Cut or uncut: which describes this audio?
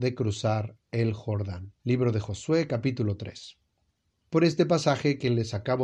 cut